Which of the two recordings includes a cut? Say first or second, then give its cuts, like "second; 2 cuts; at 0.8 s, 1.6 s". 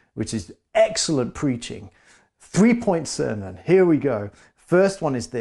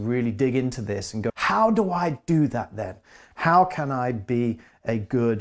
second; 1 cut; at 1.3 s